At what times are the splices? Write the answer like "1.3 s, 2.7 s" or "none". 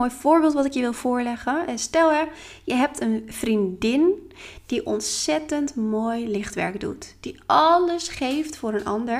none